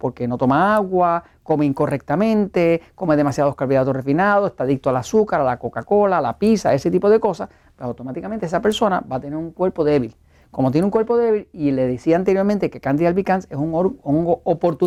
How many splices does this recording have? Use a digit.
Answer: 0